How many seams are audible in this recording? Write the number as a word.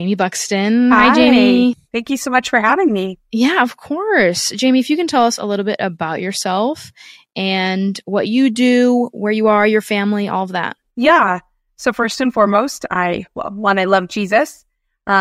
zero